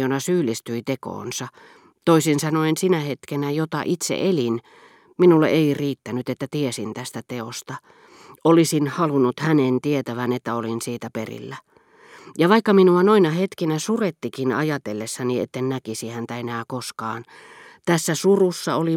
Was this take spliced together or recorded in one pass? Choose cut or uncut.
uncut